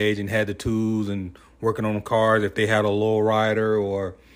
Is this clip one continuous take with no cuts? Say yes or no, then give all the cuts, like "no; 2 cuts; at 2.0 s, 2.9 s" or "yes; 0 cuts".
yes; 0 cuts